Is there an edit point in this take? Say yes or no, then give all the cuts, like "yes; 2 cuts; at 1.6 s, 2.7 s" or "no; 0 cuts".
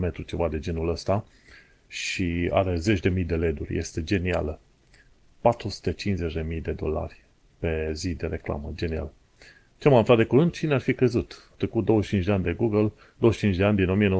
yes; 1 cut; at 10.5 s